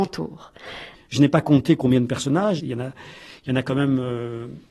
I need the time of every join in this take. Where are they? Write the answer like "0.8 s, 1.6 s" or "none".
0.9 s, 2.6 s